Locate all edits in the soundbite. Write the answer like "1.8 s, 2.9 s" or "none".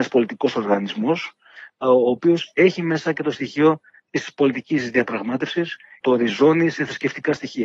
6.0 s